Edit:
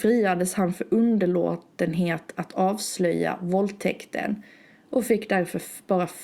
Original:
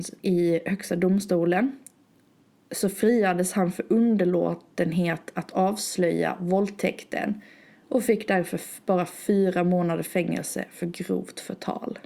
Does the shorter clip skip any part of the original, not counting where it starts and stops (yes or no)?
no